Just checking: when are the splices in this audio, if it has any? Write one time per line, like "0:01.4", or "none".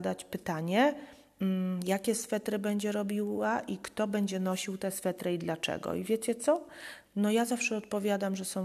0:07.1